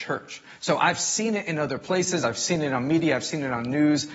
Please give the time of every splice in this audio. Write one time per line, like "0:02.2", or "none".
none